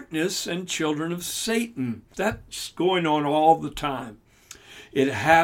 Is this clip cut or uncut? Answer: cut